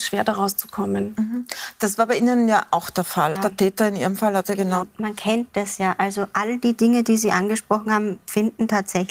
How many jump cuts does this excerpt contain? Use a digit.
2